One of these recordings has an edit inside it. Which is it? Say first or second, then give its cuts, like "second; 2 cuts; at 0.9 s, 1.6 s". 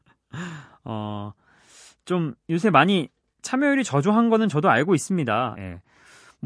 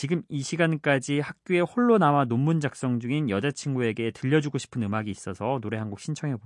first; 1 cut; at 5.5 s